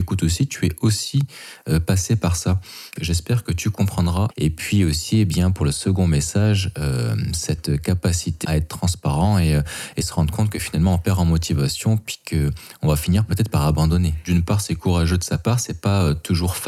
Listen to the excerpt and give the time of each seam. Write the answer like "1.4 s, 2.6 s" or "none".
3.0 s, 4.3 s, 8.4 s